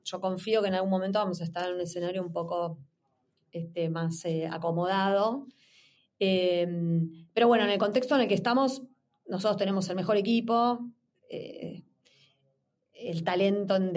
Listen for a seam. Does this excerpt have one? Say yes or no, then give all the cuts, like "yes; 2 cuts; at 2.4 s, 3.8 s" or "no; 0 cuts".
no; 0 cuts